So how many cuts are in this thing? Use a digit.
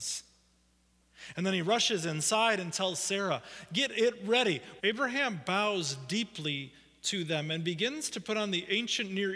1